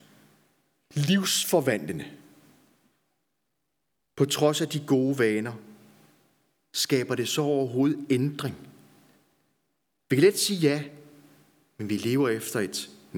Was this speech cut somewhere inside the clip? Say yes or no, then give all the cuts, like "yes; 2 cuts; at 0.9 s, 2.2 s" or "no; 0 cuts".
no; 0 cuts